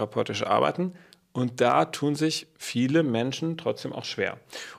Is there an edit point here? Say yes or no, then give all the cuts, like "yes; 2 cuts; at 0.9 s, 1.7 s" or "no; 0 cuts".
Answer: no; 0 cuts